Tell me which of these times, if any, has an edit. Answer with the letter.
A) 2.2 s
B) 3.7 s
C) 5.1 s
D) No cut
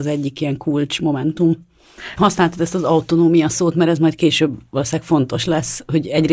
A